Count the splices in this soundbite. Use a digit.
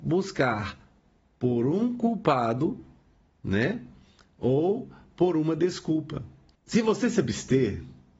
0